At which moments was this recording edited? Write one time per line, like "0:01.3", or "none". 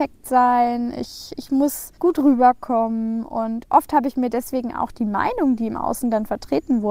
0:02.0